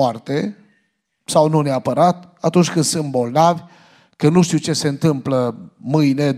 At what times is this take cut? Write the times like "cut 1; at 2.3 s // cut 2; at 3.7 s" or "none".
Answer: none